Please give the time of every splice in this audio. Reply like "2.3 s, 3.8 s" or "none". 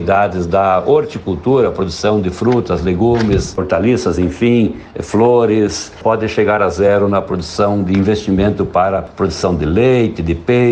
3.6 s